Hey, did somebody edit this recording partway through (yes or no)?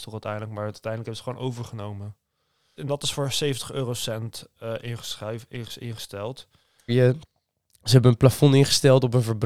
yes